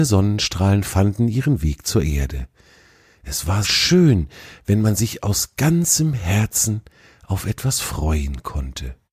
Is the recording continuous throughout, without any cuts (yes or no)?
no